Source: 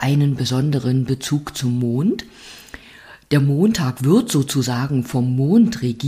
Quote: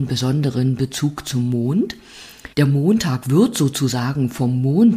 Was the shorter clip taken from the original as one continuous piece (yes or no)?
no